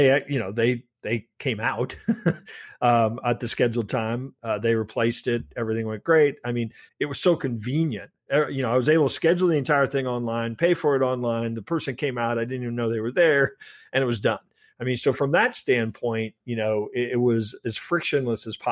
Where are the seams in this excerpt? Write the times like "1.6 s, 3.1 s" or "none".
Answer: 6.9 s